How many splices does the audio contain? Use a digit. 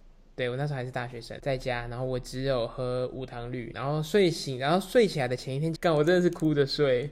3